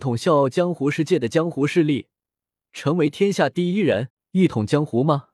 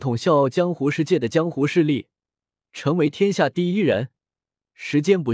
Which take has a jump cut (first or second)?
first